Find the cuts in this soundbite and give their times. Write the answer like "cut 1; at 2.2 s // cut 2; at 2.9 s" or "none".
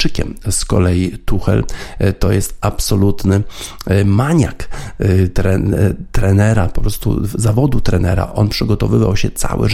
none